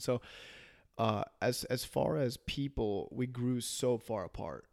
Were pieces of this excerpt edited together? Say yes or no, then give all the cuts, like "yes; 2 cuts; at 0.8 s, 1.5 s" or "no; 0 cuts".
no; 0 cuts